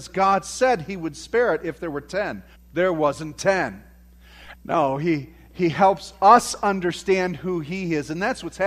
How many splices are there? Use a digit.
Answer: 2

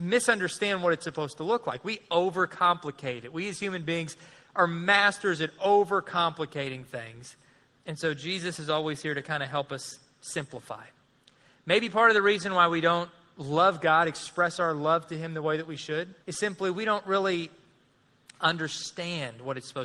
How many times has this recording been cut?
1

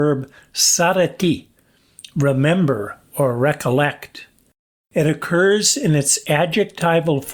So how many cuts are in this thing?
0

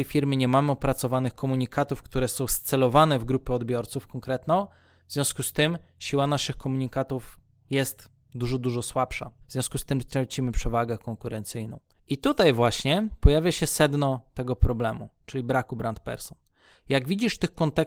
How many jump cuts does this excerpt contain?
2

